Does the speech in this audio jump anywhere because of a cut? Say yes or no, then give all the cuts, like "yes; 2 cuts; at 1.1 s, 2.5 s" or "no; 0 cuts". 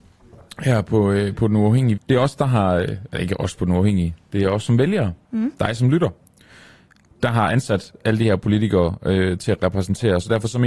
yes; 1 cut; at 2.0 s